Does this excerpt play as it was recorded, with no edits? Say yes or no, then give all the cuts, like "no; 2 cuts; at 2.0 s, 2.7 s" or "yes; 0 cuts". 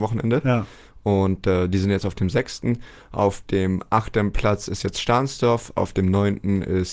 yes; 0 cuts